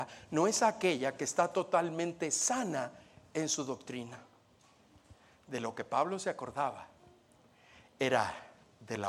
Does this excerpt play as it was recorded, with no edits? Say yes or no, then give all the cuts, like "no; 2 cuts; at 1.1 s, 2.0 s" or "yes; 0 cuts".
yes; 0 cuts